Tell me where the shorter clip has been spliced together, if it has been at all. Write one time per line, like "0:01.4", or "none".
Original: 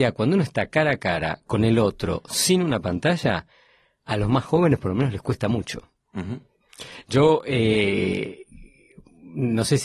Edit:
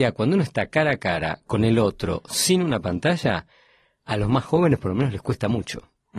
none